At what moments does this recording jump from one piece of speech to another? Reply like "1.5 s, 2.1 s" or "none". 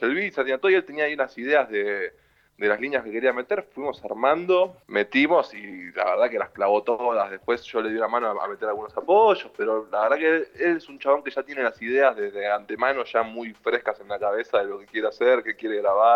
4.8 s